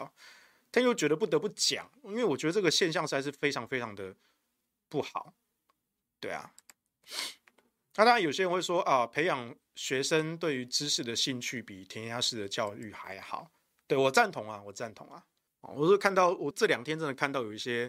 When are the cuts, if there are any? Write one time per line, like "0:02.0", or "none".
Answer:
0:15.5
0:16.5